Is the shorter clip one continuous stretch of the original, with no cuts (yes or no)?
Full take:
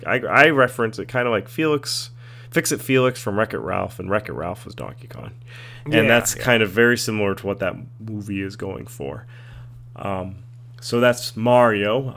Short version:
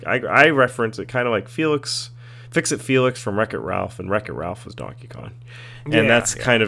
yes